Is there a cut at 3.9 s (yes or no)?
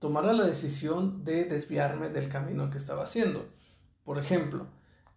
yes